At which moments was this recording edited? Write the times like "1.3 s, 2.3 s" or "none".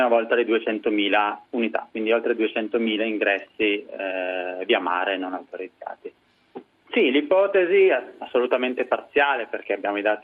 1.5 s, 6.8 s